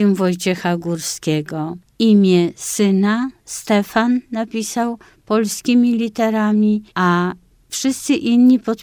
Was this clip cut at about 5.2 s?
no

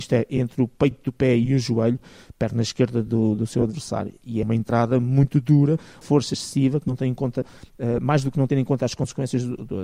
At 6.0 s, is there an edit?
yes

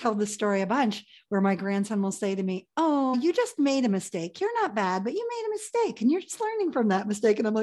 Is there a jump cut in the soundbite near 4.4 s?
no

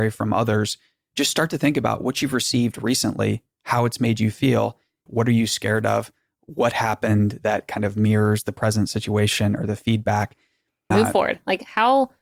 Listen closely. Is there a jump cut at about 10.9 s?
yes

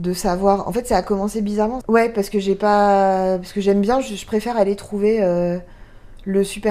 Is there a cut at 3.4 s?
no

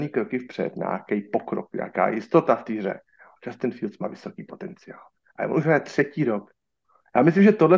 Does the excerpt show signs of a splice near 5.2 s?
no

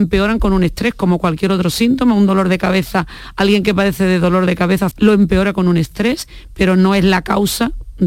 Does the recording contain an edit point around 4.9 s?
yes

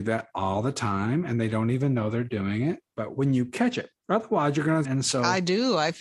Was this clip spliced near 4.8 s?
yes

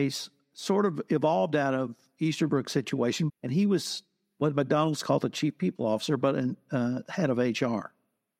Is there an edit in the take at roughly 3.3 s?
yes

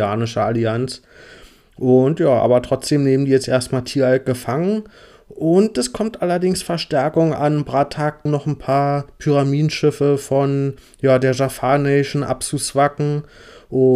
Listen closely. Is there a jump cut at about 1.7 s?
no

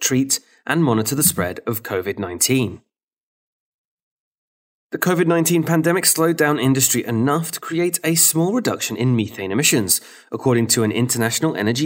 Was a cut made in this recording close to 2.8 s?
no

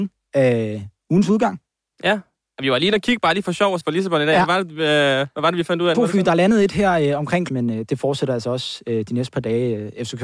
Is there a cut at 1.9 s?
no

